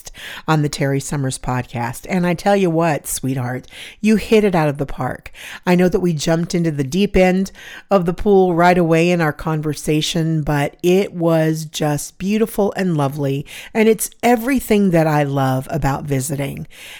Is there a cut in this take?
no; 0 cuts

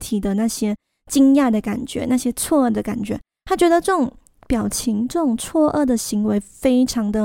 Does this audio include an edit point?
no; 0 cuts

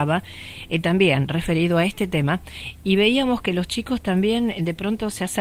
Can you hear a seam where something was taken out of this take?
no; 0 cuts

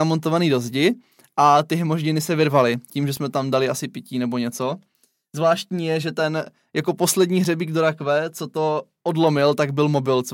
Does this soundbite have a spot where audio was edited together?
no; 0 cuts

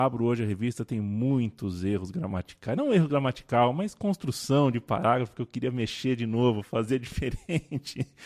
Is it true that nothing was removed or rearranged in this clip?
yes; 0 cuts

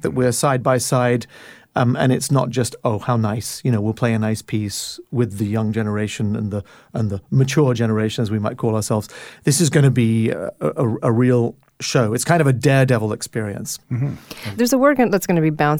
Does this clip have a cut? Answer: no; 0 cuts

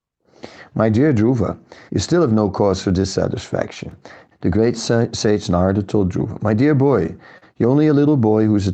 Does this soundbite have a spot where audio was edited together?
yes; 2 cuts; at 1.9 s, 4.3 s

